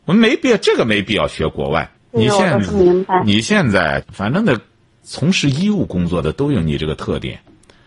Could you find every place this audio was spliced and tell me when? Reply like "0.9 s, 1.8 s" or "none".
2.0 s, 4.0 s